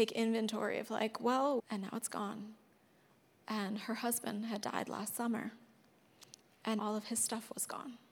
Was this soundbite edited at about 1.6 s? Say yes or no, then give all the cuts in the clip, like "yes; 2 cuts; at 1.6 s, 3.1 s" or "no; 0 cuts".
yes; 2 cuts; at 1.6 s, 6.8 s